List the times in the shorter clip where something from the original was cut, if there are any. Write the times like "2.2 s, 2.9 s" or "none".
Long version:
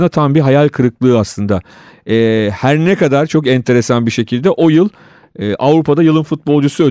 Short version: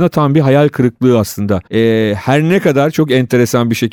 1.7 s

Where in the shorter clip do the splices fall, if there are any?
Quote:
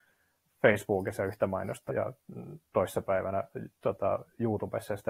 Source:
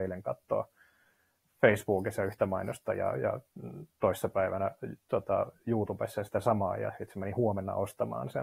1.9 s

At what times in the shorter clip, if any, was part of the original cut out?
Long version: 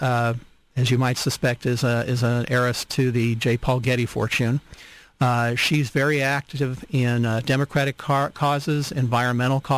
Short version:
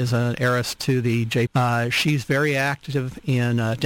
1.5 s

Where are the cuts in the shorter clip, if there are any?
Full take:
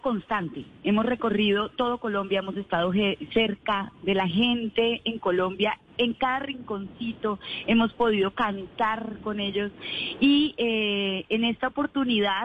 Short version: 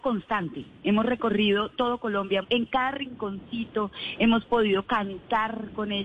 2.4 s

